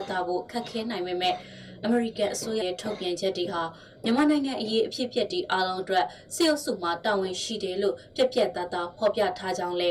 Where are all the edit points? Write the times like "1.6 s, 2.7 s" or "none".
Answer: 2.6 s